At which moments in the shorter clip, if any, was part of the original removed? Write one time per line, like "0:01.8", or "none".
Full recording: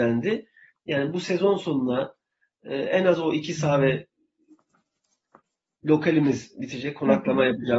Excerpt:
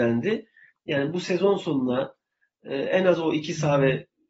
none